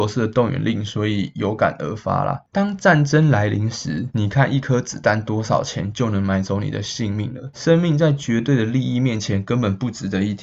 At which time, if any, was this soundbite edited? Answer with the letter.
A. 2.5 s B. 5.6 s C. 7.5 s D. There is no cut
A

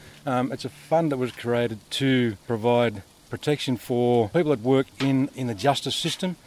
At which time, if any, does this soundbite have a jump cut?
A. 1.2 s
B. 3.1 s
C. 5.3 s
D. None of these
C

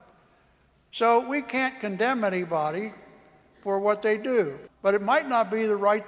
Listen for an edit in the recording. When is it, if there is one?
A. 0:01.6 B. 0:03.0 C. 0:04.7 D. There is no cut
C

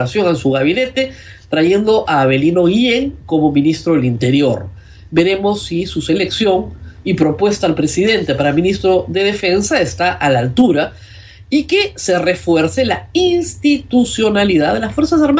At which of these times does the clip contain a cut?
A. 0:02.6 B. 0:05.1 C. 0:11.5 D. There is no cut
D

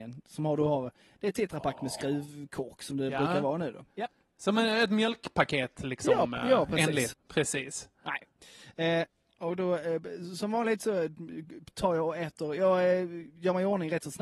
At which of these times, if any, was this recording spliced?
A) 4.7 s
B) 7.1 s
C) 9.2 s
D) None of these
B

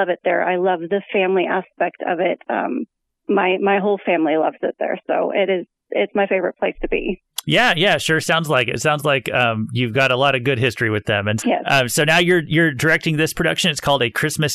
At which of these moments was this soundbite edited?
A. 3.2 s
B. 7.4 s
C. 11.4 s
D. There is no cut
C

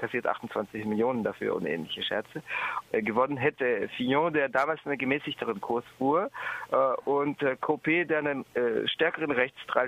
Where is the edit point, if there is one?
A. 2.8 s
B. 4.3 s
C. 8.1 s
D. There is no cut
A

